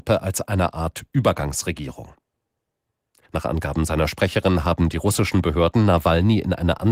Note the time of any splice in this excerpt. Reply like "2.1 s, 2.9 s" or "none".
3.3 s